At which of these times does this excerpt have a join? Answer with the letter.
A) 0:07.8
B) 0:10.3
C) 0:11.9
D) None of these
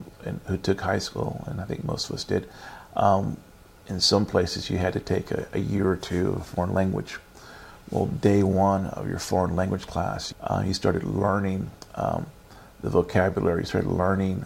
B